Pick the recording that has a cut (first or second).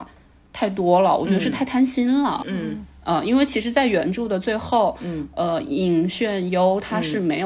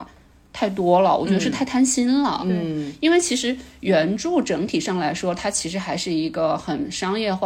first